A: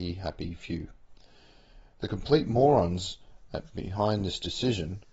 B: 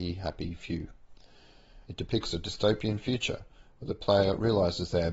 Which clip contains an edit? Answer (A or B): B